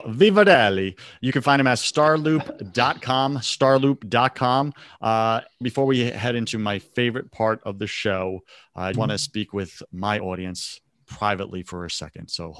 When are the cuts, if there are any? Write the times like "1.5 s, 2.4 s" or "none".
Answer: 5.6 s, 8.9 s